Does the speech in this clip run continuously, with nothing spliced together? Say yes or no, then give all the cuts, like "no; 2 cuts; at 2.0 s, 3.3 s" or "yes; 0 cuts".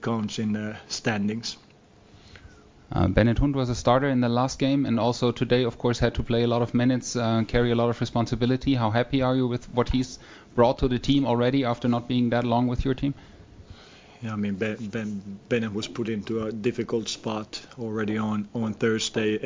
yes; 0 cuts